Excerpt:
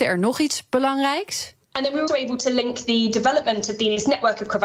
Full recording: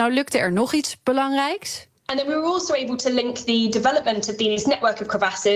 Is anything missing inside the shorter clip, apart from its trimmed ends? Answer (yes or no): yes